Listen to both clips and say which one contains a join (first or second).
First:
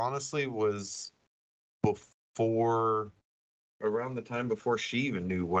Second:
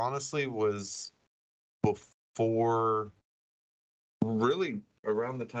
first